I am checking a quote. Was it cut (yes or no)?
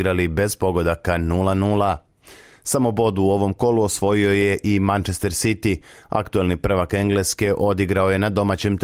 no